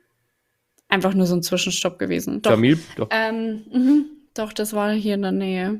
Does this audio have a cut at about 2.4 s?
yes; 1 cut; at 2.4 s

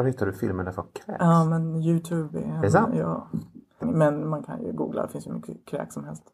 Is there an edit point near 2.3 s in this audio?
no; 1 cut; at 3.8 s

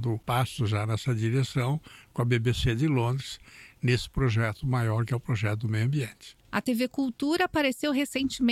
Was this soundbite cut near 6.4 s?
yes; 1 cut; at 6.4 s

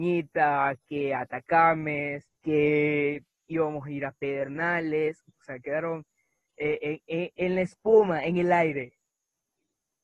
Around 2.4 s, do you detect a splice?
yes; 2 cuts; at 2.4 s, 5.3 s

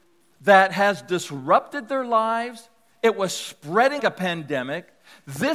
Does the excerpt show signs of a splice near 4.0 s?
yes; 1 cut; at 4.0 s

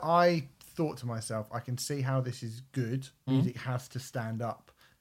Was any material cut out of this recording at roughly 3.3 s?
yes; 1 cut; at 3.3 s

